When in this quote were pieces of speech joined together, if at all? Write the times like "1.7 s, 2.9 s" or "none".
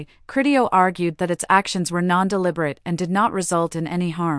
none